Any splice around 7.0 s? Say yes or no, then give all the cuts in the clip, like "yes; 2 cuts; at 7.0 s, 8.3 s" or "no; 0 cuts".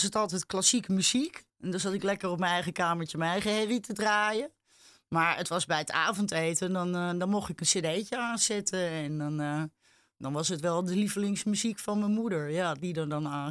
no; 1 cut; at 1.5 s